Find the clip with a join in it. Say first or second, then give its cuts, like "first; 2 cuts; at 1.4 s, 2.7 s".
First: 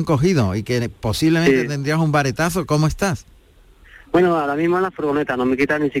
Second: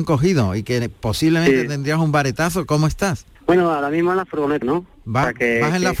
second; 2 cuts; at 3.3 s, 4.6 s